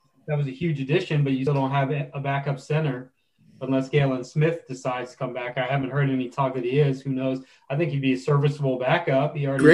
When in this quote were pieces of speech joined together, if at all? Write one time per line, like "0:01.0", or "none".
0:01.5